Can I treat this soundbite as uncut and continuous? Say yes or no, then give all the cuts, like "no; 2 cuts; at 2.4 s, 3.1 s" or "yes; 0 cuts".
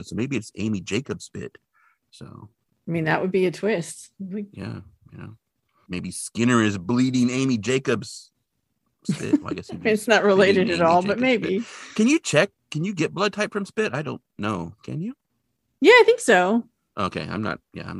yes; 0 cuts